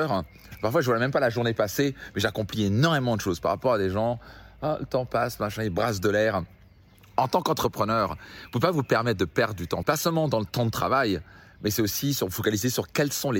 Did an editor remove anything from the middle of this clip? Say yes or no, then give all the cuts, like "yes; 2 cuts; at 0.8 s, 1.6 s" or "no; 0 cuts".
yes; 1 cut; at 9.8 s